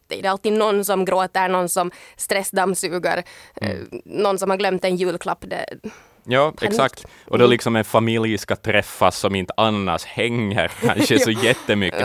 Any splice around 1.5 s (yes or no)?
no